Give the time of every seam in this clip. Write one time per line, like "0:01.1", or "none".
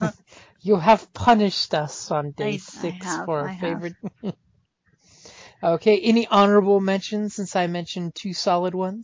0:04.0